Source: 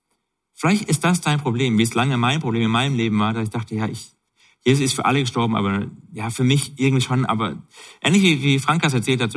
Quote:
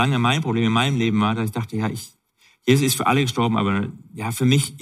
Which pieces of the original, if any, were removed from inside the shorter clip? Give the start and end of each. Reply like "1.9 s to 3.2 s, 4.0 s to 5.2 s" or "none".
none